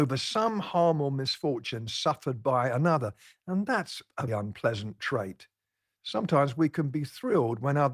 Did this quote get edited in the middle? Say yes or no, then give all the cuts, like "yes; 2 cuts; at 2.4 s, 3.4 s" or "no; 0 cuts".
yes; 1 cut; at 4.3 s